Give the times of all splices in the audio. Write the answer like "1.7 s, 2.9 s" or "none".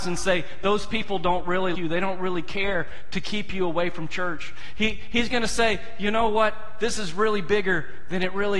1.7 s